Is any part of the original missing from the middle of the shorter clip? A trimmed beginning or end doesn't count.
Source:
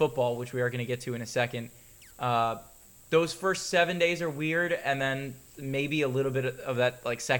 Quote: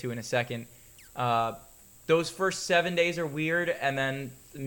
no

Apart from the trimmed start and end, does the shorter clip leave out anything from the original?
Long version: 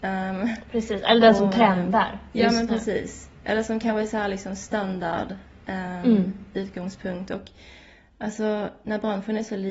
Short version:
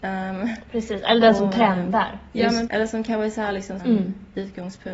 yes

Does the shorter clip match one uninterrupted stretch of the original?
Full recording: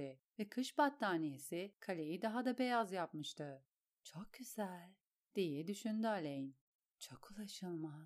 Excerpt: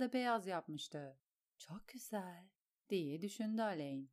yes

